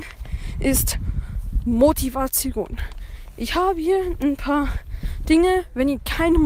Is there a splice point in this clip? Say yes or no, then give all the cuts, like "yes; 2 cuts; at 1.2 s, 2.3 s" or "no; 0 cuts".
no; 0 cuts